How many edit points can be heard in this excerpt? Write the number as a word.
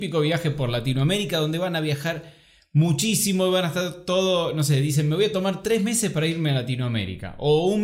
zero